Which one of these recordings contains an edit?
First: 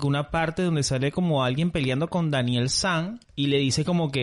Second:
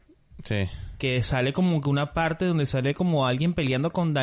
first; 1 cut; at 3.2 s

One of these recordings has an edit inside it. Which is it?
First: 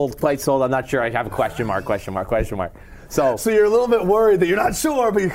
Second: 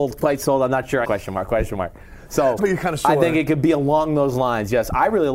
second; 2 cuts; at 1.0 s, 2.6 s

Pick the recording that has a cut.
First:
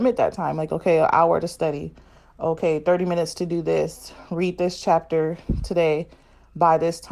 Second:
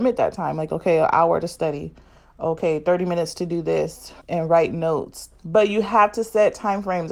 second; 2 cuts; at 4.2 s, 5.4 s

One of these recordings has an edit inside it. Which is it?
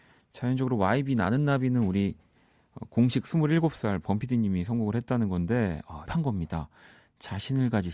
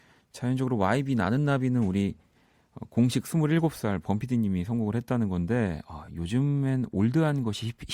first; 1 cut; at 6.1 s

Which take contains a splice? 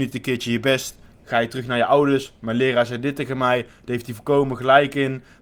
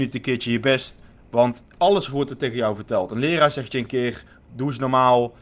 second; 1 cut; at 1.2 s

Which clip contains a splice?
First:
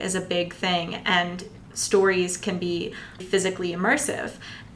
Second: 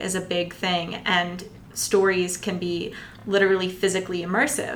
first; 1 cut; at 3.2 s

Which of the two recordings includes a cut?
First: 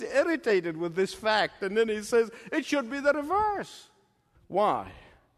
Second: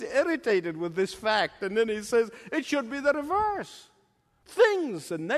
first; 1 cut; at 4.3 s

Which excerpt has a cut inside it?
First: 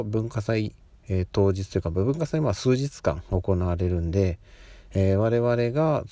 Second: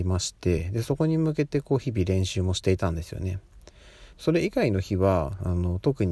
second; 1 cut; at 4.1 s

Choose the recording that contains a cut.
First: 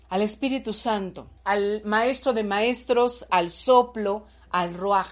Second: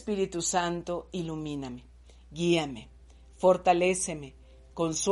first; 2 cuts; at 1.4 s, 3.3 s

